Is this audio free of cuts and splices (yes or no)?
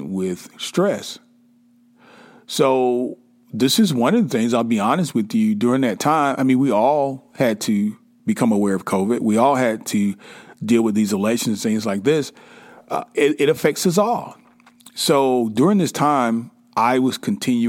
yes